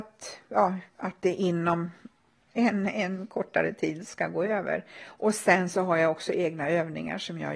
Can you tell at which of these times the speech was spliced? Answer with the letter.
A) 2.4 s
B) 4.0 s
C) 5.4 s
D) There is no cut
B